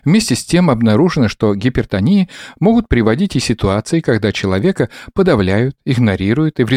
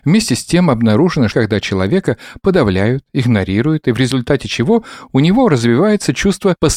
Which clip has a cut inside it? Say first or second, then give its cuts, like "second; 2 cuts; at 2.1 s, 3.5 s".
second; 1 cut; at 1.3 s